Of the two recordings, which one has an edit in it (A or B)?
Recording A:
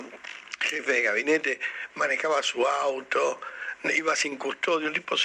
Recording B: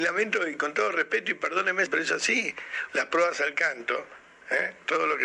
B